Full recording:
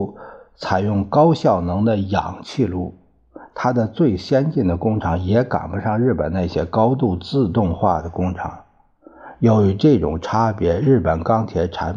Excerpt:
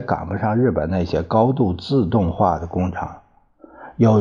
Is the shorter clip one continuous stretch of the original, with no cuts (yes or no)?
yes